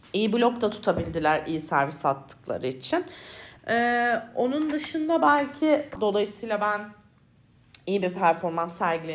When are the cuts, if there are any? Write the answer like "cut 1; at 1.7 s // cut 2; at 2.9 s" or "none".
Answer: cut 1; at 3.6 s // cut 2; at 6.0 s